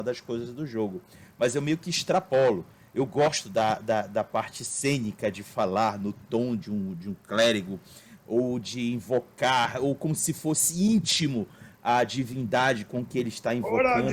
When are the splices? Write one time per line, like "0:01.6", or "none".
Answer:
none